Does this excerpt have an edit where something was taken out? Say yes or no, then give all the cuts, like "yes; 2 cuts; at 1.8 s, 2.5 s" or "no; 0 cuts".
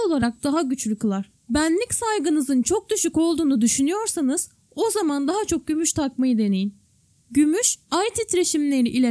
yes; 2 cuts; at 1.4 s, 7.2 s